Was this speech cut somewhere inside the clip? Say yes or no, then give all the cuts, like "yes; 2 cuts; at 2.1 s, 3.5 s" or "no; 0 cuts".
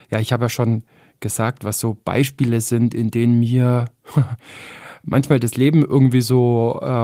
no; 0 cuts